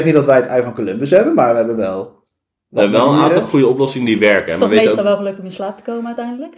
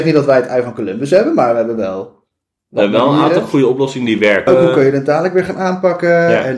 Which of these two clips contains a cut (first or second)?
second